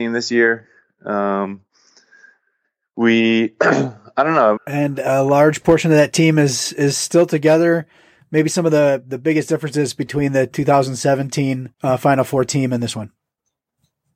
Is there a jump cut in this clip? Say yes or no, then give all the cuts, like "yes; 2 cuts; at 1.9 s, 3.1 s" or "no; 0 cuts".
yes; 2 cuts; at 4.6 s, 11.7 s